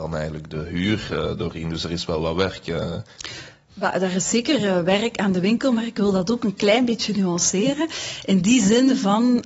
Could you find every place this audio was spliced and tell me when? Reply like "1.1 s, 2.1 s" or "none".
none